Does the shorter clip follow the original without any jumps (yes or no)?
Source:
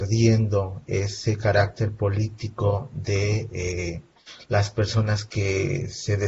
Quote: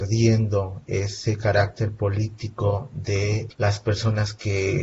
no